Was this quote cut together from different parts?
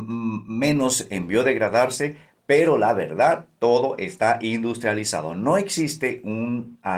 no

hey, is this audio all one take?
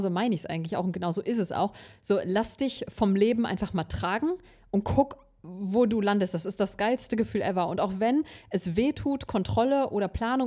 yes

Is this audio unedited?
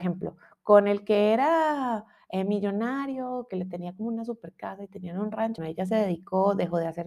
no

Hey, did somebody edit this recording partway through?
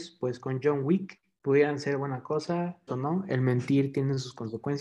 yes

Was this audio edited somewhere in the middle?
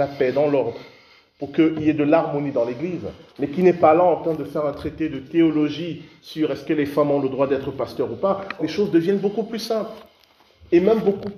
yes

